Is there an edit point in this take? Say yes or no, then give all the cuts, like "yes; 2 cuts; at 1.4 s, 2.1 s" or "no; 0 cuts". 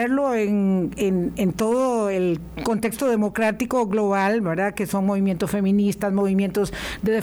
no; 0 cuts